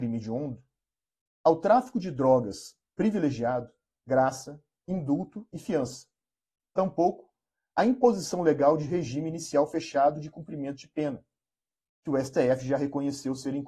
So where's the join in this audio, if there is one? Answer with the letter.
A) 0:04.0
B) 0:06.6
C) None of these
A